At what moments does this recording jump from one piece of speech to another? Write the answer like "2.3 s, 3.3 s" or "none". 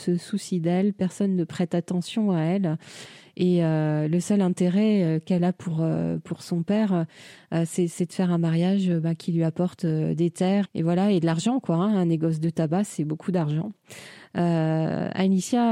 10.6 s